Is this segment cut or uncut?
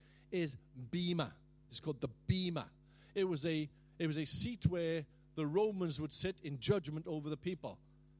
cut